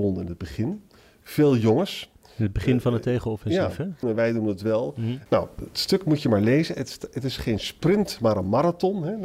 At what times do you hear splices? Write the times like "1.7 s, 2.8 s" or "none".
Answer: 4.0 s, 5.3 s